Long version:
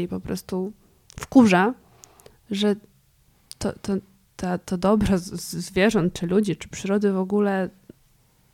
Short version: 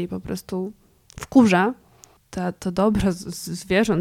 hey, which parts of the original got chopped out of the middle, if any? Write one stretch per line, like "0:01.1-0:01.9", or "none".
0:02.2-0:04.2